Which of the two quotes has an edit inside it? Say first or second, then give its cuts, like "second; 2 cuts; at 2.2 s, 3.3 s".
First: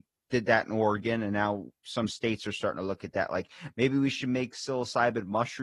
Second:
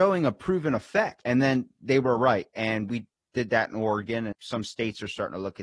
second; 2 cuts; at 1.2 s, 4.3 s